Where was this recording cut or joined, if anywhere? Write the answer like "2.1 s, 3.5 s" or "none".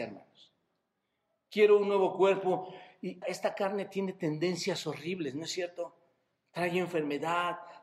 3.2 s